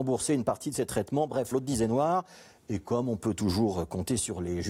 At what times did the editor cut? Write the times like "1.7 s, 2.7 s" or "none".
1.5 s

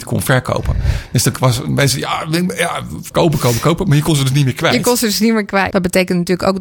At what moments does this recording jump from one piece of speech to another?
3.1 s, 5.7 s

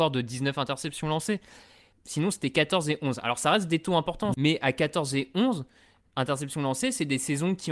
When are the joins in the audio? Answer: 1.9 s, 4.3 s

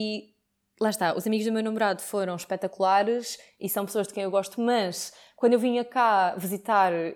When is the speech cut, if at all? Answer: 4.6 s

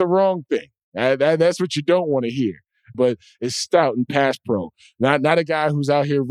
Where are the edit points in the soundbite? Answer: 2.9 s

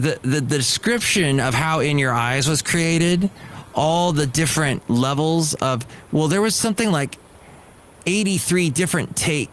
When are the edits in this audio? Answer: none

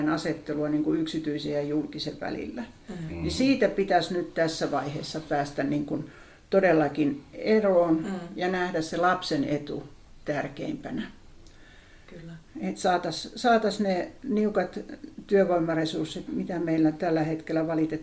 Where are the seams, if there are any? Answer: 16.3 s

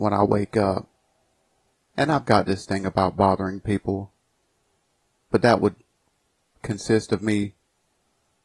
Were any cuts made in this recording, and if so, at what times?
1.7 s, 5.2 s

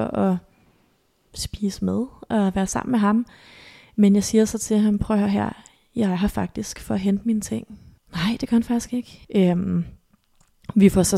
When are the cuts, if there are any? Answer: 8.0 s, 9.2 s

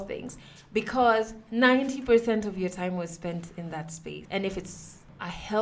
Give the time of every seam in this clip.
4.2 s

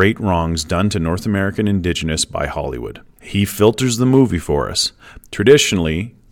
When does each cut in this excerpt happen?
3.2 s, 5.2 s

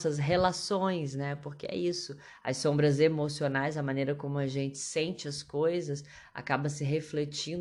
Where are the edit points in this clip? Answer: none

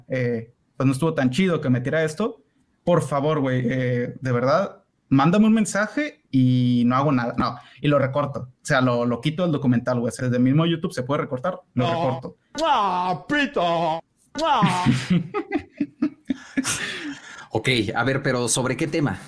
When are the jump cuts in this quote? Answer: 10.2 s

